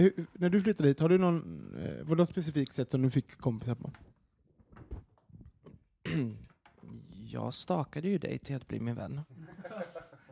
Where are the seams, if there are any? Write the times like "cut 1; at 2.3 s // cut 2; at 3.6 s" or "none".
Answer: none